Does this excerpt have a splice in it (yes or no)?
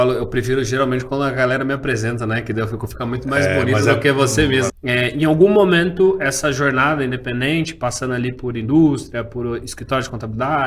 yes